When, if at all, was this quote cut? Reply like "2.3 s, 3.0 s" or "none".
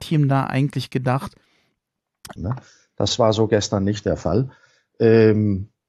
2.4 s